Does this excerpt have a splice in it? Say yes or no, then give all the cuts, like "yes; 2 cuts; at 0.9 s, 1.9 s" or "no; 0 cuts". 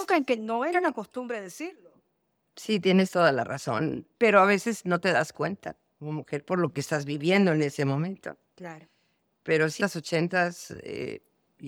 yes; 2 cuts; at 4.1 s, 9.8 s